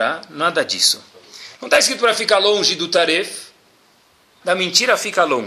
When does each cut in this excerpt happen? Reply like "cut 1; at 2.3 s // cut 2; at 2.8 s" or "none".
cut 1; at 1.6 s // cut 2; at 4.4 s